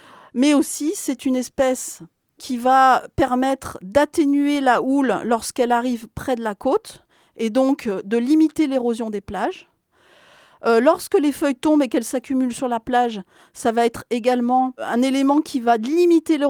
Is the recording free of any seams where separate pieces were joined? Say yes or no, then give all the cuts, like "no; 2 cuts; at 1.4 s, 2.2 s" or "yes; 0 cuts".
yes; 0 cuts